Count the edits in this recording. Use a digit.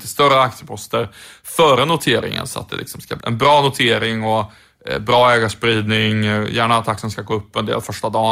1